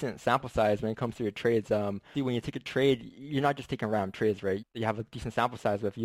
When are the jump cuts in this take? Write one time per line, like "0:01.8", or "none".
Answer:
0:02.1
0:04.6